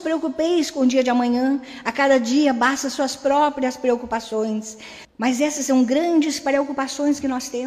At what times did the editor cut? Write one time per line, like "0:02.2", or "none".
0:05.0